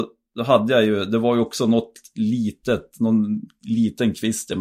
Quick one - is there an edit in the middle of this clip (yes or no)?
no